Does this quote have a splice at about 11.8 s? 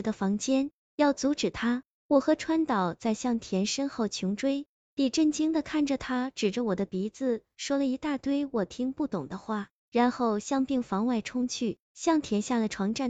yes; 2 cuts; at 4.8 s, 11.8 s

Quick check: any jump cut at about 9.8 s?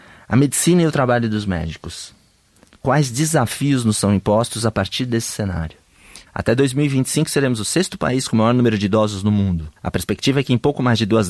yes; 2 cuts; at 6.3 s, 9.8 s

